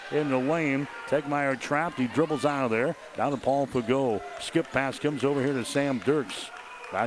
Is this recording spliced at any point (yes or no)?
no